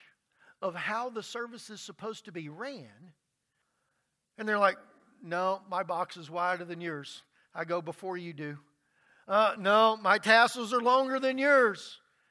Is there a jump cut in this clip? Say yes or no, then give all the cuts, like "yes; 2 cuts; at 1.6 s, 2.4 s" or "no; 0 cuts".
no; 0 cuts